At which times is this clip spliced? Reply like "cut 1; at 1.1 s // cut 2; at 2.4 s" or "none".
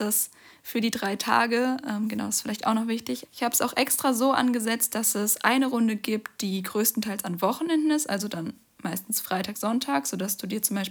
cut 1; at 3.2 s // cut 2; at 9.5 s